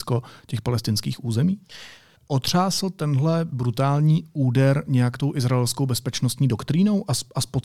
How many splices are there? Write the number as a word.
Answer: one